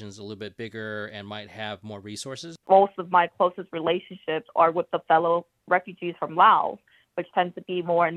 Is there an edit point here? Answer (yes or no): yes